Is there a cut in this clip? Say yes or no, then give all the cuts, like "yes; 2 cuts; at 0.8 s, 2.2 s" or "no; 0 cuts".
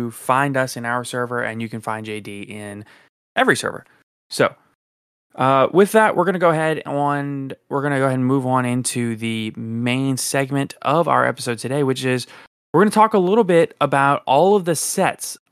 no; 0 cuts